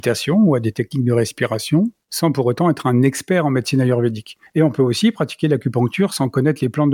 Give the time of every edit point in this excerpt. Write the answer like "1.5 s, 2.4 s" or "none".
4.5 s